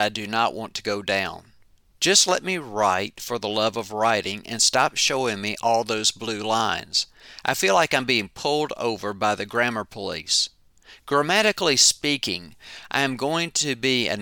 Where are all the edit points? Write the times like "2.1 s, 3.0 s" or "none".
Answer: none